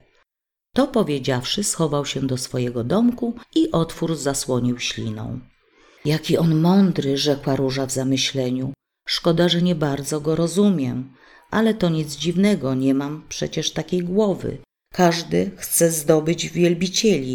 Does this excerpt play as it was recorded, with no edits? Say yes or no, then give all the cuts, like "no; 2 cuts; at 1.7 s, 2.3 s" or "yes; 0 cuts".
no; 1 cut; at 14.9 s